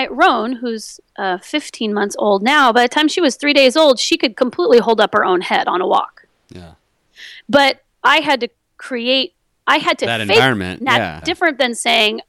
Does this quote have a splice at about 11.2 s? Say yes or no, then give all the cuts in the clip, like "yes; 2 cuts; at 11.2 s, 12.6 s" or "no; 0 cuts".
yes; 1 cut; at 11.2 s